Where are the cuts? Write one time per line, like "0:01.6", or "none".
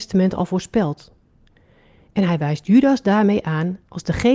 0:02.1